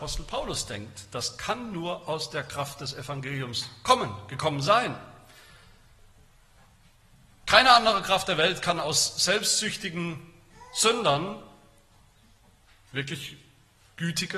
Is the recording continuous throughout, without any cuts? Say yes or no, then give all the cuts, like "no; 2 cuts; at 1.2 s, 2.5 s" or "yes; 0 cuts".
yes; 0 cuts